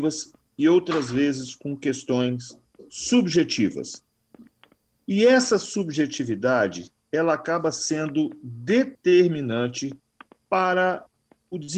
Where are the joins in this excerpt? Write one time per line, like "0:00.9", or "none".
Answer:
none